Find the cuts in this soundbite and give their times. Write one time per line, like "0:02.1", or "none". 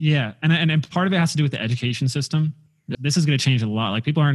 0:02.9